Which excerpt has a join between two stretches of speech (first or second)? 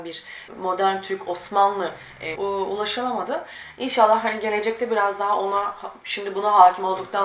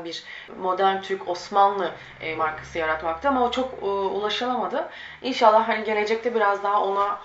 first